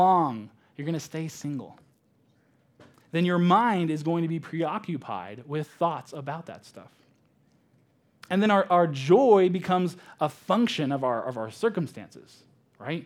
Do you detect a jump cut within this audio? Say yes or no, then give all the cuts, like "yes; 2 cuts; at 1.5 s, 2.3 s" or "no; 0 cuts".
no; 0 cuts